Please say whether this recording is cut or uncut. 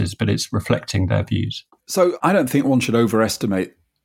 uncut